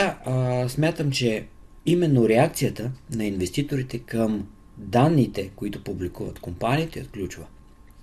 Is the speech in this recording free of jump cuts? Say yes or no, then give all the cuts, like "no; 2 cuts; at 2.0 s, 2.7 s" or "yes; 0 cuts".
yes; 0 cuts